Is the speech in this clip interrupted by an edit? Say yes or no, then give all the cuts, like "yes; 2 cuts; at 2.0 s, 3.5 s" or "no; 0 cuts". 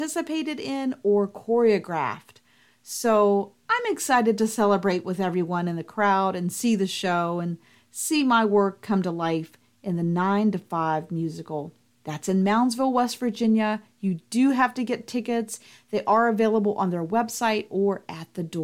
no; 0 cuts